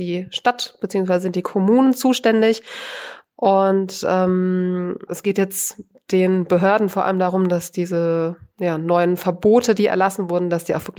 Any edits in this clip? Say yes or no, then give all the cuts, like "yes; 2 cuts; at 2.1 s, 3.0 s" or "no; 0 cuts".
yes; 1 cut; at 5.1 s